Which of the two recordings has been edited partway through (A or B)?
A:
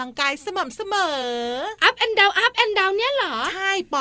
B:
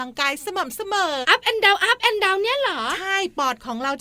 B